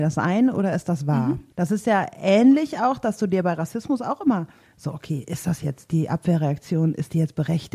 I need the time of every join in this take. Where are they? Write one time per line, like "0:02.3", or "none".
0:01.5